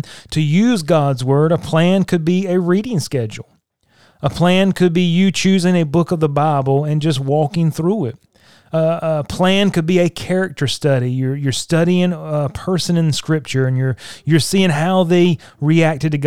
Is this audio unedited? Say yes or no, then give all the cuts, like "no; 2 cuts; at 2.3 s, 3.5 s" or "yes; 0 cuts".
yes; 0 cuts